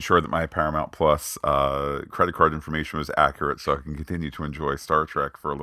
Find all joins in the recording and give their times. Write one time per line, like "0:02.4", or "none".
none